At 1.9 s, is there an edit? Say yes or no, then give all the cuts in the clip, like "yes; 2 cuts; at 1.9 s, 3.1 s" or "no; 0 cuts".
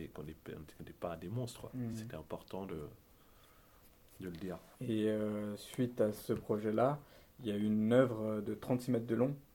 no; 0 cuts